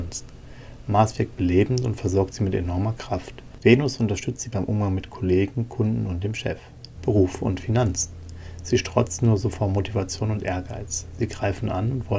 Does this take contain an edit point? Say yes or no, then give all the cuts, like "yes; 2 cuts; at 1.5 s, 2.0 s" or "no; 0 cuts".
yes; 2 cuts; at 3.6 s, 7.0 s